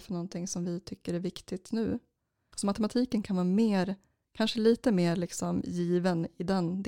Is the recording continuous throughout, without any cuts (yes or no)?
no